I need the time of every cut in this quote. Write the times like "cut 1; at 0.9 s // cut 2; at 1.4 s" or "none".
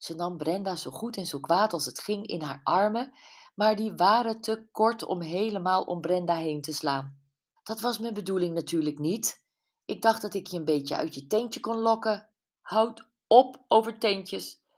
cut 1; at 7.6 s // cut 2; at 12.6 s

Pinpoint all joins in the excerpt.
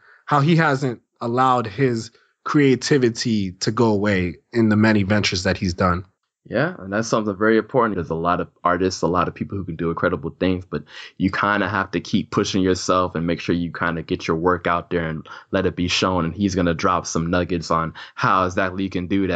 cut 1; at 7.9 s

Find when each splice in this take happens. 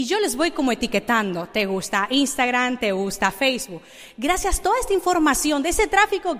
none

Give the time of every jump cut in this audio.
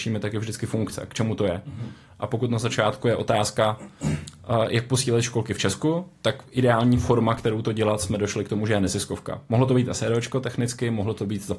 none

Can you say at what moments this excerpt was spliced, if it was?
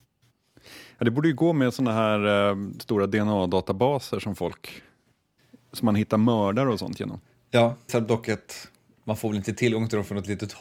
cut 1; at 7.9 s

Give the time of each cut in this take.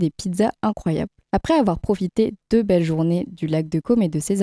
cut 1; at 1.2 s

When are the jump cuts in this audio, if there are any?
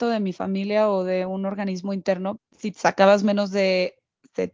cut 1; at 2.4 s

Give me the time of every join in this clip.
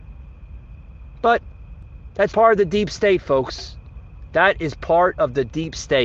cut 1; at 2.3 s

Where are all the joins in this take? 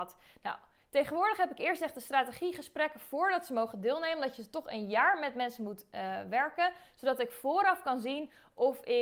none

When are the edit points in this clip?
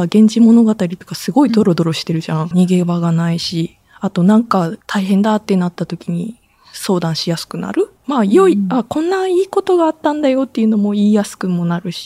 cut 1; at 2.5 s // cut 2; at 4.8 s // cut 3; at 8.0 s

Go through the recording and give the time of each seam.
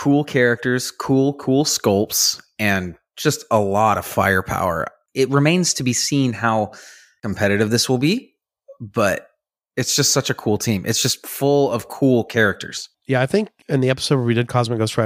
cut 1; at 13.6 s

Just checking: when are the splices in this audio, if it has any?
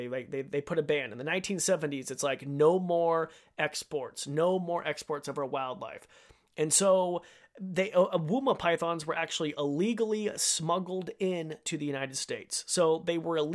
none

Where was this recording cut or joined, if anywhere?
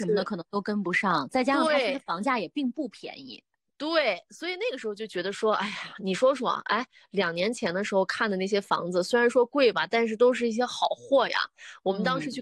none

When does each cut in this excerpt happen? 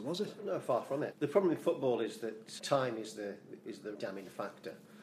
cut 1; at 1.1 s // cut 2; at 2.6 s // cut 3; at 3.9 s

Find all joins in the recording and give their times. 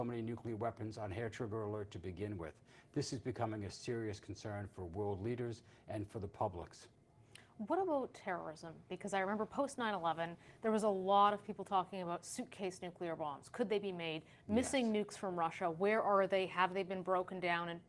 none

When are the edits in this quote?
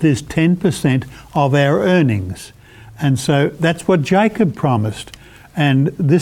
none

